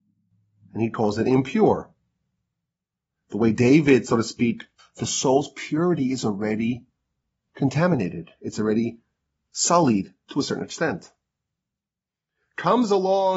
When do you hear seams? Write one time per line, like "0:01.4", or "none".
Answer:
0:04.8